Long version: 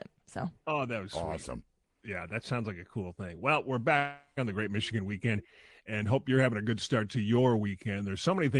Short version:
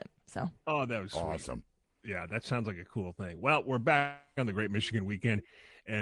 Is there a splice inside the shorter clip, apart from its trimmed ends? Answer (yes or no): no